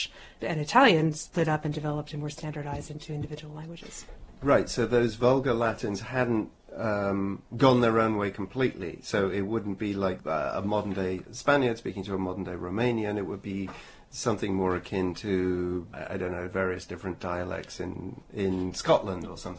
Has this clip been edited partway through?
no; 0 cuts

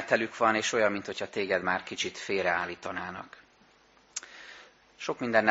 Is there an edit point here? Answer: no; 0 cuts

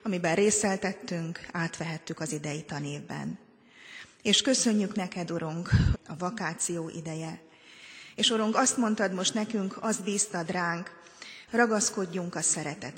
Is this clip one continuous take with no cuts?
no; 2 cuts; at 5.9 s, 11.5 s

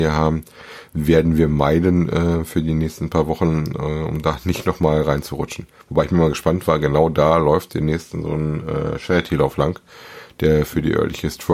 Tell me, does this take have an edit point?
no; 0 cuts

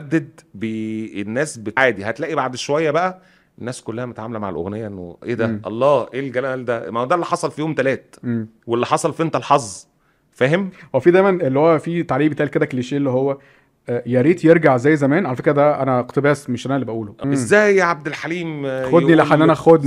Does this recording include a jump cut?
yes; 2 cuts; at 1.8 s, 17.2 s

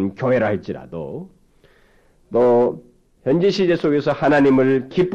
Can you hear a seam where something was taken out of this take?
yes; 1 cut; at 3.2 s

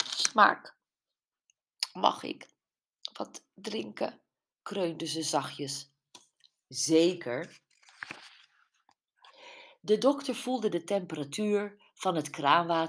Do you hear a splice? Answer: no; 0 cuts

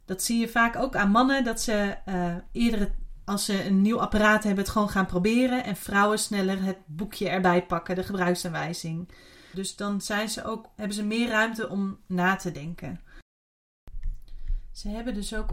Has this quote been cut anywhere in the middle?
yes; 2 cuts; at 9.5 s, 10.8 s

